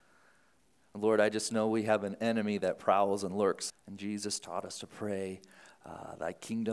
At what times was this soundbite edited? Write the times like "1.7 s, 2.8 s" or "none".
3.7 s